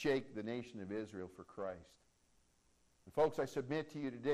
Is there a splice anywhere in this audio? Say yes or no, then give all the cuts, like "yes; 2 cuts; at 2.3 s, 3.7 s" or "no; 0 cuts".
no; 0 cuts